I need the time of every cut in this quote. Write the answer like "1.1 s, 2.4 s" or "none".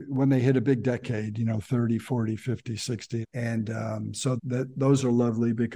3.2 s, 4.4 s